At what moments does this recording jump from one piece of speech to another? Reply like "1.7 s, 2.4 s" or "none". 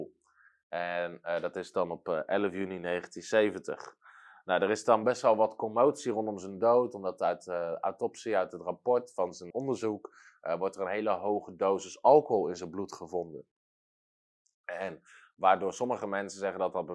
9.5 s

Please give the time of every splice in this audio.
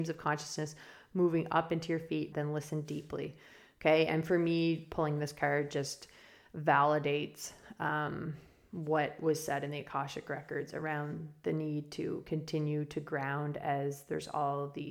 2.3 s

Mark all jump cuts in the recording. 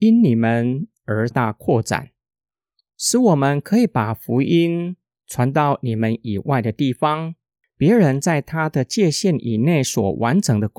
1.3 s

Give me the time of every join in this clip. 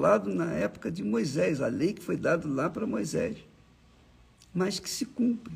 none

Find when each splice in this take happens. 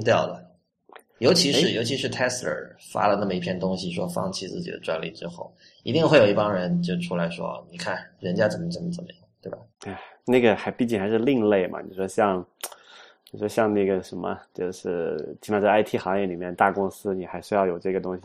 none

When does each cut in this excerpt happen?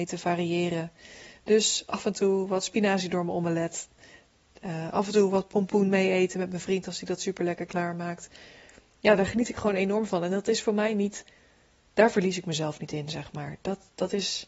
none

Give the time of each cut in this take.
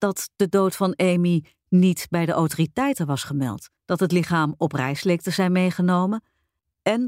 3.8 s

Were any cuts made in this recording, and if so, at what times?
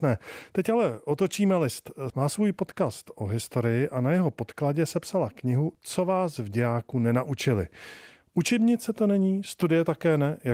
2.1 s

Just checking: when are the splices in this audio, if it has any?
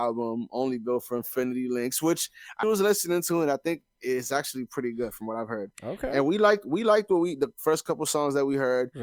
2.6 s

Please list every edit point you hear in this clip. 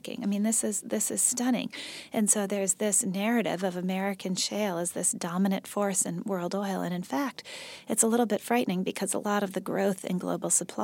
none

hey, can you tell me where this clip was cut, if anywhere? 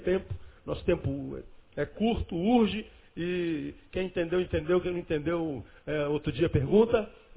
none

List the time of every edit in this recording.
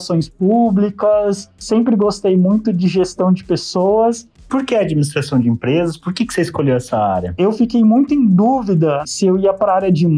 4.4 s, 9.0 s

